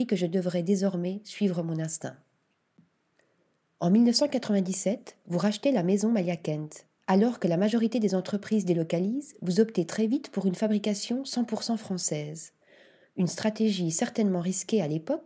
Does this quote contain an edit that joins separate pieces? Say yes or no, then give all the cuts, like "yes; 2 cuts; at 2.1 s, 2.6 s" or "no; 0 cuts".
no; 0 cuts